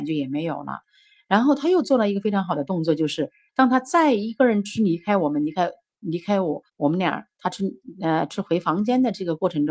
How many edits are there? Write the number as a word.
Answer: two